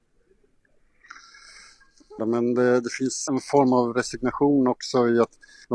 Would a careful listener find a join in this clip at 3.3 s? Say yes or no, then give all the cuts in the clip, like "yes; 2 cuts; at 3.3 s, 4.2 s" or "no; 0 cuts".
yes; 2 cuts; at 2.2 s, 3.3 s